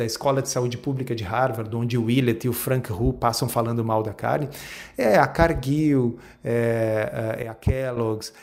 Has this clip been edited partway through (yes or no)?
no